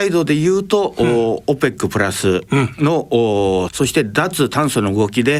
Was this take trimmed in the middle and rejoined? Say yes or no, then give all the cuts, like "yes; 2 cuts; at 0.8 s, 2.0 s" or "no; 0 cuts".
yes; 1 cut; at 3.7 s